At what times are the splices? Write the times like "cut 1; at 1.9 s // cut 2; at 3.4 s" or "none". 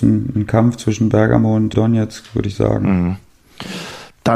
cut 1; at 1.7 s